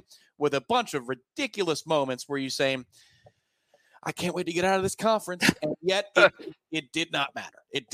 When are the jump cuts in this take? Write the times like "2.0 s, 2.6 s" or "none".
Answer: none